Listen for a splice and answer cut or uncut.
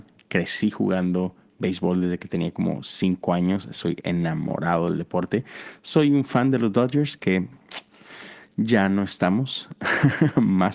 uncut